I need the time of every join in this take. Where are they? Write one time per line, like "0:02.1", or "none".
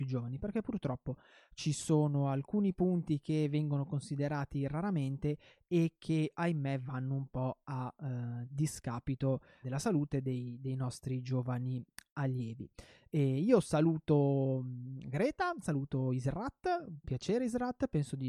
0:09.6
0:15.6